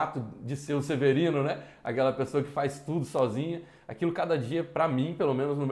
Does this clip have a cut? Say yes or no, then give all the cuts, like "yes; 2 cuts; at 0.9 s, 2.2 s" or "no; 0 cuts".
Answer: no; 0 cuts